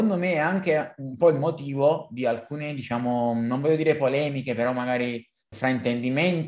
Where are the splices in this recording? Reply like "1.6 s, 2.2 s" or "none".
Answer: 5.5 s